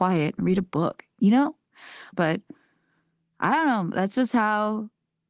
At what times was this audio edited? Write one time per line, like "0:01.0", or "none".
0:02.1

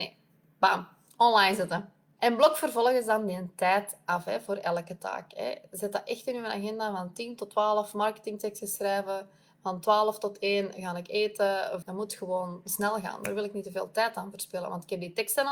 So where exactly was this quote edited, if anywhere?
0:11.8

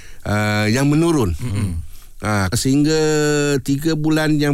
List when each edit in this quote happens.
0:02.5

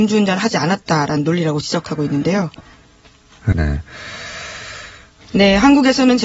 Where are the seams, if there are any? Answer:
0:03.5
0:05.2

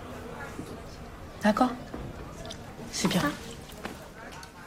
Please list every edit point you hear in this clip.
none

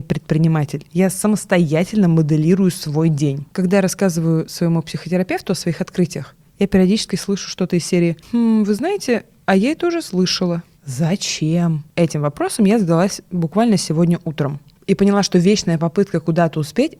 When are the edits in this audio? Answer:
0:03.5
0:10.7

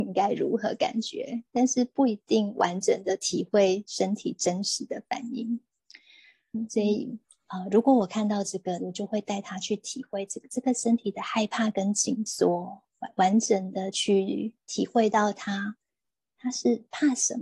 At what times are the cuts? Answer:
0:08.8

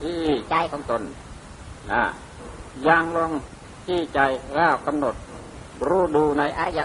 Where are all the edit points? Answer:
none

